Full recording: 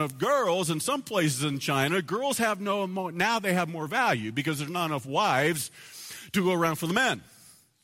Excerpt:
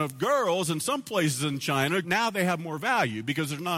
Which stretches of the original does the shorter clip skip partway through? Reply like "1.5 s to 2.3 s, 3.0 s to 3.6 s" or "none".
2.0 s to 3.1 s